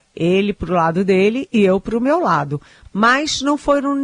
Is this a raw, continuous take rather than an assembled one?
no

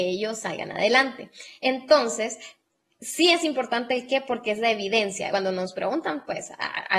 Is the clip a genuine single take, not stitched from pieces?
no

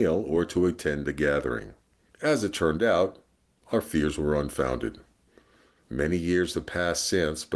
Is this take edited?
yes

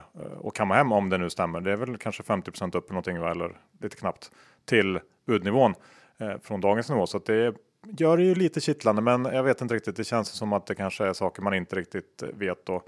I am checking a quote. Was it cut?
no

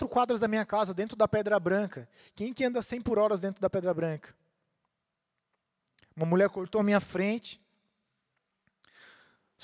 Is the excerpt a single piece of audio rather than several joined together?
yes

